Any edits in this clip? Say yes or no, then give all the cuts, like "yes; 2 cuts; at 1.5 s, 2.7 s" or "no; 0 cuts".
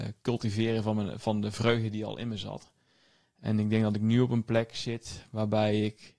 no; 0 cuts